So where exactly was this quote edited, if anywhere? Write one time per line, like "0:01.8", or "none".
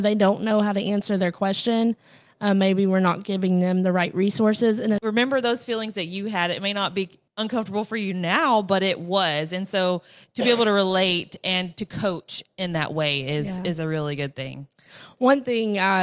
0:05.0
0:07.3